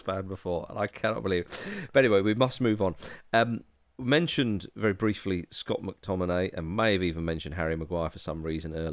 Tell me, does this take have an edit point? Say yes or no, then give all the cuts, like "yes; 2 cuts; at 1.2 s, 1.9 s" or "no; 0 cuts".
no; 0 cuts